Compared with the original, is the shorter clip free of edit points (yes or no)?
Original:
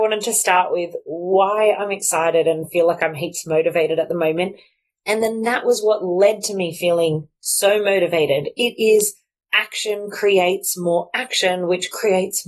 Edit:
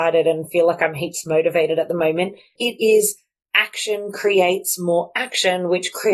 no